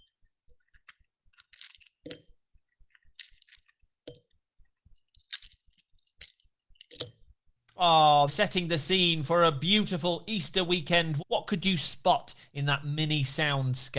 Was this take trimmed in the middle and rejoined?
yes; 2 cuts; at 8.3 s, 11.2 s

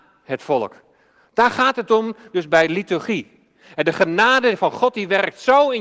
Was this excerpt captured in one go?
yes; 0 cuts

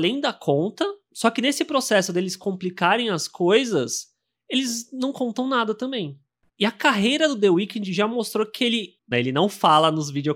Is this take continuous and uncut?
no; 2 cuts; at 6.5 s, 9.1 s

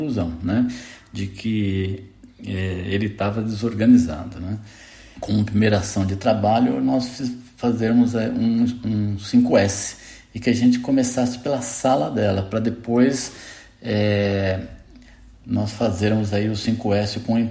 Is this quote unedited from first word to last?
no; 1 cut; at 5.1 s

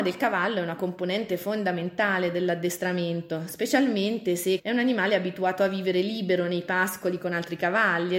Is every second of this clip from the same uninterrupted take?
no; 1 cut; at 4.6 s

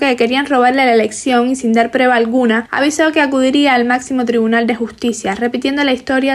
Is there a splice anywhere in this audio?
no; 0 cuts

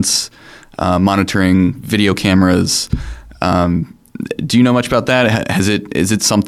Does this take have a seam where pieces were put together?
no; 0 cuts

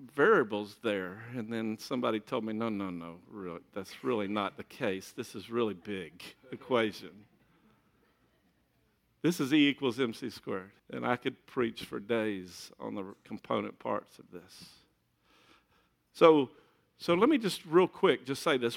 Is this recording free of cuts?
no; 1 cut; at 10.8 s

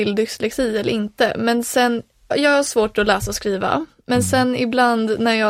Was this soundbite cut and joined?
yes; 1 cut; at 2.3 s

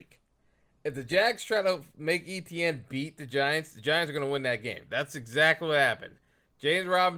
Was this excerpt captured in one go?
yes; 0 cuts

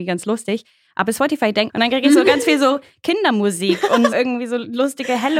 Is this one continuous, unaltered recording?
no; 2 cuts; at 1.7 s, 4.1 s

